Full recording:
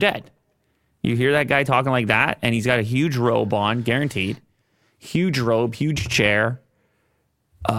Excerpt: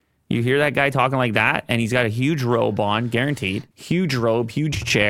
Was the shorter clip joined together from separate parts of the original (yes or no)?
yes